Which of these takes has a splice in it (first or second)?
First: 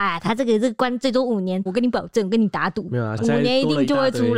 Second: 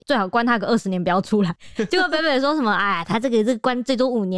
first